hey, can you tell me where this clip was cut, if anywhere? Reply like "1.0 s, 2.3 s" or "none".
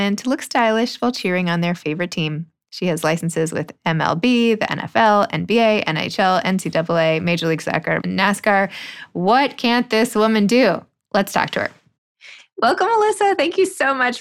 8.0 s